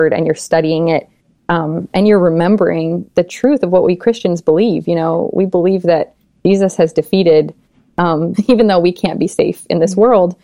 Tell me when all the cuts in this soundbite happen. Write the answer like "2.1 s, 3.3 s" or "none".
8.3 s